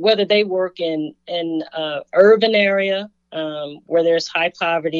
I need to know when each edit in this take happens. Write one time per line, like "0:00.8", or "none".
none